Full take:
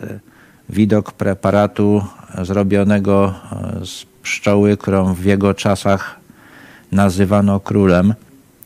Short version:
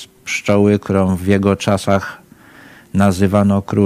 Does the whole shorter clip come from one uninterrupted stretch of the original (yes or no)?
yes